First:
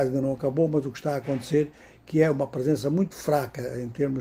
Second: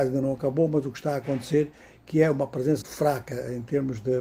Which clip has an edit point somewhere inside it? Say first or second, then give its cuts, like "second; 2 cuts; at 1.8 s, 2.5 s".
second; 1 cut; at 2.8 s